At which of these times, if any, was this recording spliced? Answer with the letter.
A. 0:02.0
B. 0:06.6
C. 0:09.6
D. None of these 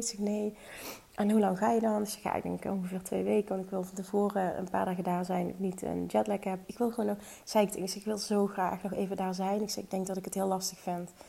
B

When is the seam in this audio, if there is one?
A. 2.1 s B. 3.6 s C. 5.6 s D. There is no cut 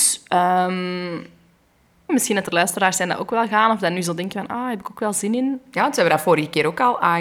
A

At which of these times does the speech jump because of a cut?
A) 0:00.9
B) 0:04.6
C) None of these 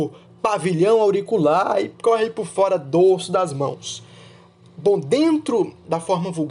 C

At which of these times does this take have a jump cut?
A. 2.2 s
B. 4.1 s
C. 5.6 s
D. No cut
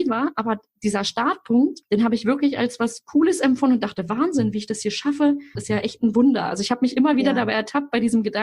C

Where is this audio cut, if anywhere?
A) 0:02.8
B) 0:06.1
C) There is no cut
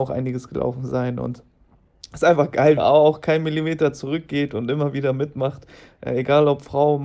A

